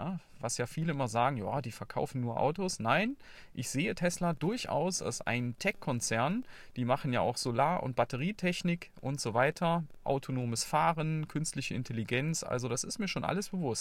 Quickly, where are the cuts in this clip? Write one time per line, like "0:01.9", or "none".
none